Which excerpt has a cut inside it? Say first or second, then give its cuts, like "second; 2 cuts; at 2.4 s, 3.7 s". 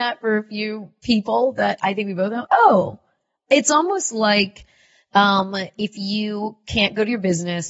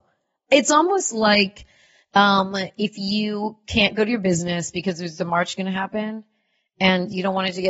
first; 1 cut; at 2.4 s